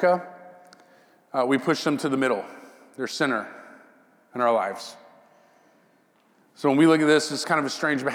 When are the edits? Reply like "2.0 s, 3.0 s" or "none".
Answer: none

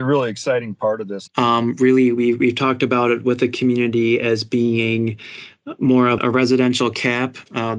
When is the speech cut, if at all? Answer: 1.3 s, 6.2 s

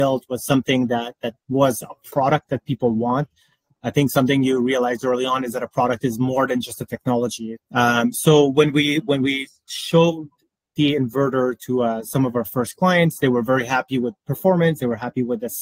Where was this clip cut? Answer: 7.6 s

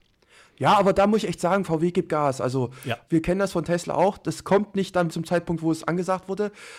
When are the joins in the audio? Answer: 3.1 s, 5.1 s

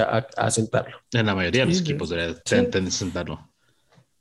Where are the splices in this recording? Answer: 1.0 s, 2.4 s

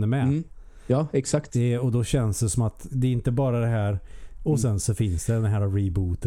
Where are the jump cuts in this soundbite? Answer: 2.9 s, 4.4 s

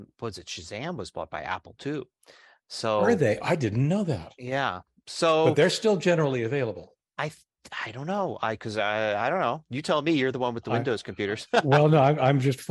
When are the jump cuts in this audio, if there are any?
none

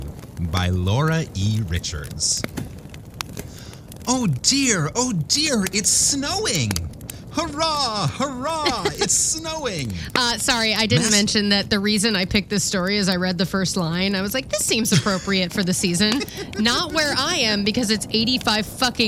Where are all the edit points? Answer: none

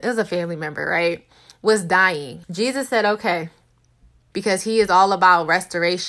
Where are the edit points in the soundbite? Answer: 2.4 s, 4.3 s

